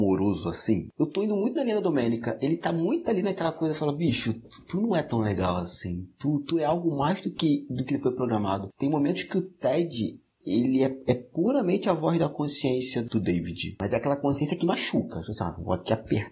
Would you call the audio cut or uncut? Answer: uncut